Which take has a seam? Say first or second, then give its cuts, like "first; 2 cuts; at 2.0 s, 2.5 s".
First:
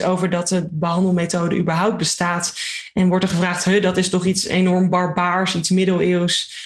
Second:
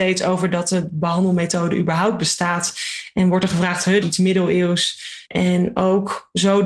second; 2 cuts; at 4.0 s, 5.3 s